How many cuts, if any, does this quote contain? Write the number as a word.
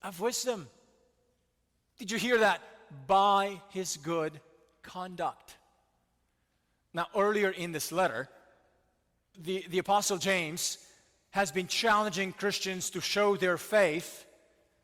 one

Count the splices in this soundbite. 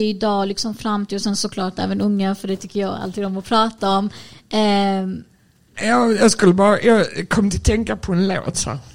one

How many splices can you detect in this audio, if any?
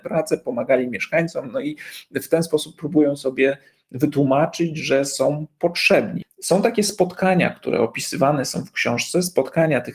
one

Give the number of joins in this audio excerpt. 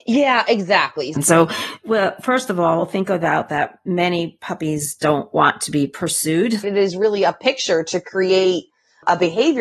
two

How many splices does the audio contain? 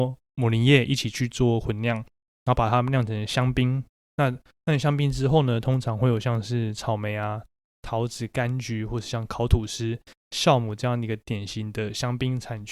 zero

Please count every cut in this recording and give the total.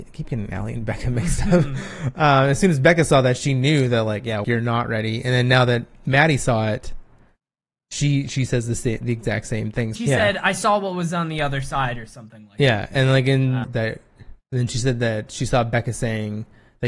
three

